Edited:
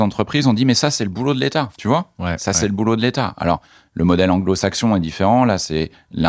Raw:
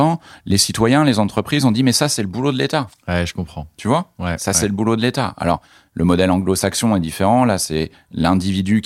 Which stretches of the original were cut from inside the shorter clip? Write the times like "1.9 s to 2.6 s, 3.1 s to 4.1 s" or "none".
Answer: 2.9 s to 3.7 s

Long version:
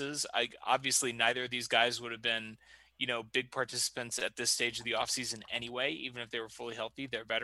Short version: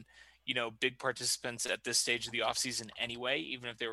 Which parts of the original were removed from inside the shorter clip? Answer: none

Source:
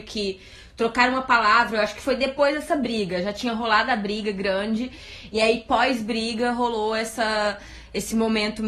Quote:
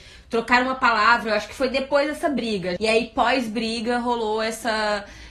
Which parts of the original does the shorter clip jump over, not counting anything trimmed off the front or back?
3.2 s to 5.3 s

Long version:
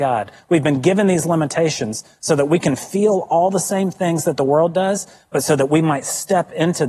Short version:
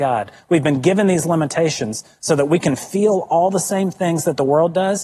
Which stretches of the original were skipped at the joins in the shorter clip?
none

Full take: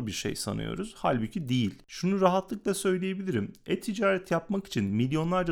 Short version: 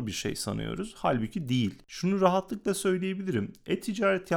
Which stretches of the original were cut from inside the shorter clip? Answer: none

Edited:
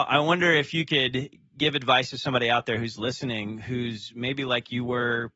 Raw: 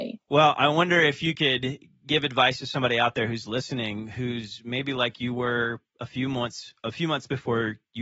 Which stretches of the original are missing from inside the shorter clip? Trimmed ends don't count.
none

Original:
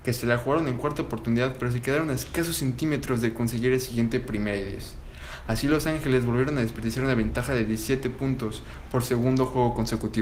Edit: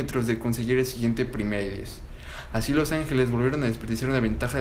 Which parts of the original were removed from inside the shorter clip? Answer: none

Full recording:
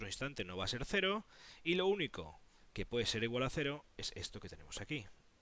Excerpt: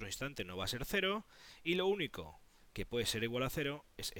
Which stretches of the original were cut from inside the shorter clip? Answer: none

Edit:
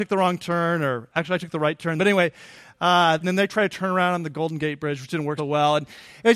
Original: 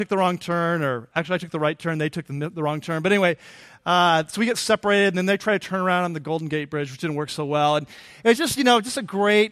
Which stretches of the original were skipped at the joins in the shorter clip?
2.0 s to 3.0 s, 4.3 s to 5.1 s, 7.3 s to 7.4 s

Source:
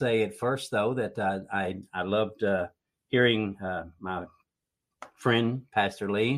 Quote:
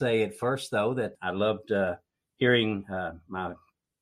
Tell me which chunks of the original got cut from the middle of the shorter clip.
1.1 s to 1.9 s

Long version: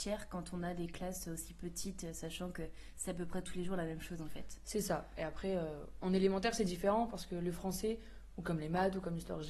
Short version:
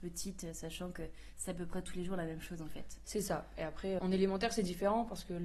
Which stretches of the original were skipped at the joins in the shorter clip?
5.6 s to 6.0 s

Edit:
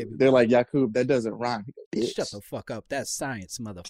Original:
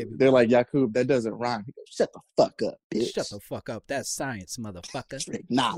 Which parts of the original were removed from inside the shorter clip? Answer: 1.9 s to 2.8 s

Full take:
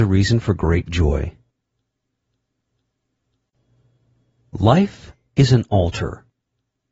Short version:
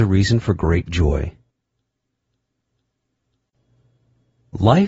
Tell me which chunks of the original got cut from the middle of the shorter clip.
none

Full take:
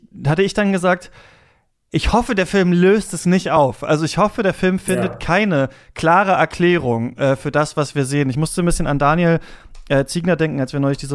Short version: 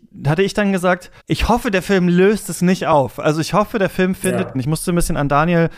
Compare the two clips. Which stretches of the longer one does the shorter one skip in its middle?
1.2 s to 1.8 s, 5.2 s to 8.2 s

